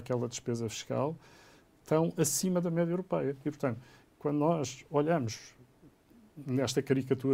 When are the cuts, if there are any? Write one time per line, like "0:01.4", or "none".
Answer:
none